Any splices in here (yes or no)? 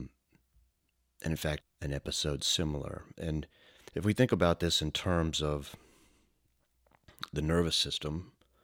yes